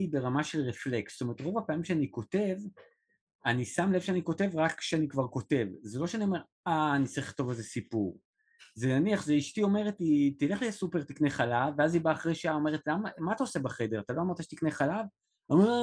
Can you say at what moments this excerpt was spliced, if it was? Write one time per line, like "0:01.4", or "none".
none